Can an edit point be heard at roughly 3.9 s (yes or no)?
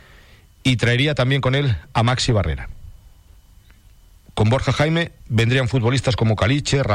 no